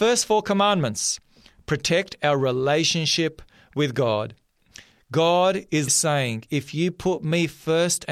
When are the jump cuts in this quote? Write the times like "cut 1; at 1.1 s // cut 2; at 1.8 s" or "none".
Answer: cut 1; at 5.9 s